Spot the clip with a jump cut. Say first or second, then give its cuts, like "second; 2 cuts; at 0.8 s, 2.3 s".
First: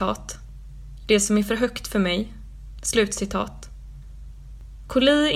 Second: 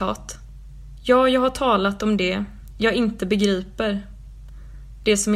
first; 2 cuts; at 1.0 s, 2.8 s